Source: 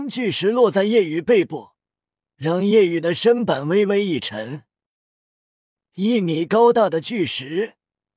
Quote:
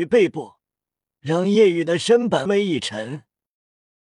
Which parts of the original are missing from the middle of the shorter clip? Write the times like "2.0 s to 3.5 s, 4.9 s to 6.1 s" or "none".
3.6 s to 3.9 s